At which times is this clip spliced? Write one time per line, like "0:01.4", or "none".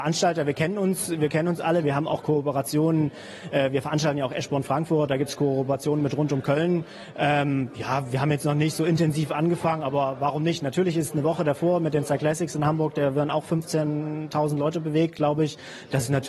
0:01.8